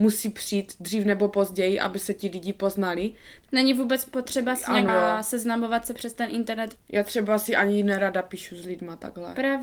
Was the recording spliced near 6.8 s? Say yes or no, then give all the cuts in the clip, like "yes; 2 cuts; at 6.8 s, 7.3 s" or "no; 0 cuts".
yes; 2 cuts; at 4.9 s, 6.8 s